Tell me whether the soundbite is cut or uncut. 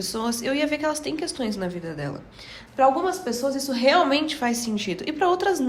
cut